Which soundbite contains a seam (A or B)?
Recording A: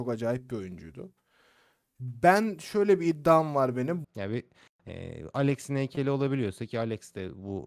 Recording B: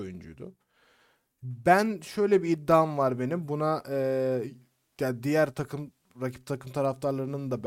A